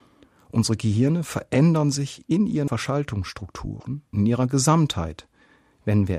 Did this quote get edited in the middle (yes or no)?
yes